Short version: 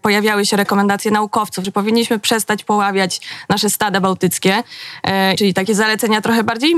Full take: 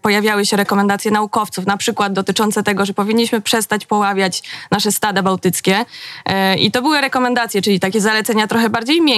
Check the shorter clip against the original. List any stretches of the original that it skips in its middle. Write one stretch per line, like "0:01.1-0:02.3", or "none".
0:01.6-0:02.9
0:06.6-0:07.6